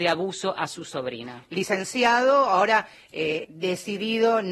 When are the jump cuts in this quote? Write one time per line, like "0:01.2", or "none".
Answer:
0:03.4